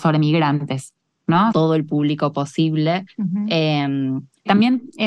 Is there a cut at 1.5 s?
yes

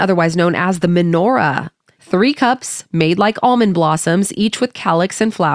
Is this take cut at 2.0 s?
yes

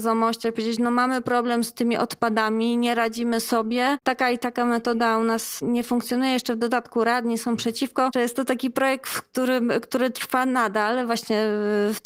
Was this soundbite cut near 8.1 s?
yes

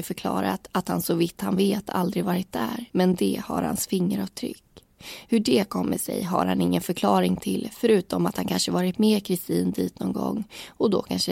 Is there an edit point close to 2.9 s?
yes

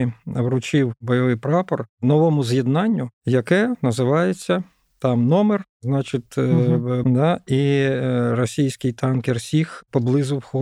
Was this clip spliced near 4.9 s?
no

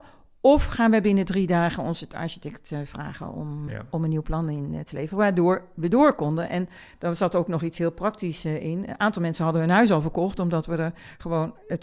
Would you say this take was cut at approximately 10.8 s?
no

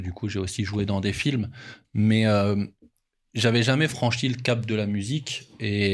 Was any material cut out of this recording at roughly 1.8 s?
yes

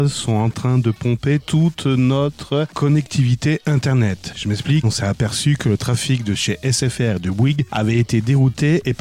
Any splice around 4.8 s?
yes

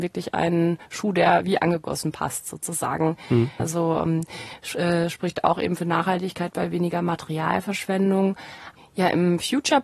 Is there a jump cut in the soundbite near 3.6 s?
yes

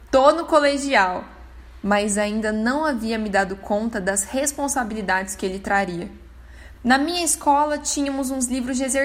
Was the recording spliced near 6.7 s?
yes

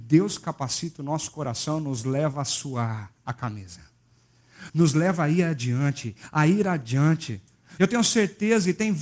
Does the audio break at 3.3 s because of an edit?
no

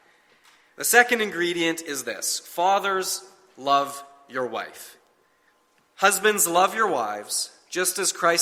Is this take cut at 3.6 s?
no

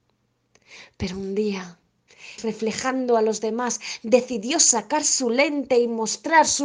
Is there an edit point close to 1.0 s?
no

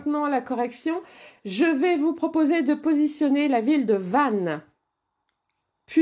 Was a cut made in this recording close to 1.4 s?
no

